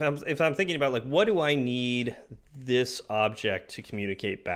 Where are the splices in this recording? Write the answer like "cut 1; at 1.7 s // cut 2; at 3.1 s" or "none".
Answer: none